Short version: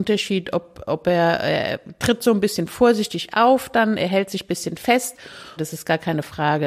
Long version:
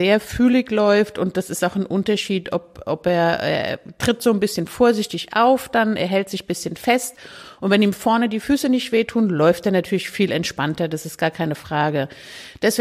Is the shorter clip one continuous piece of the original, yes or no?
no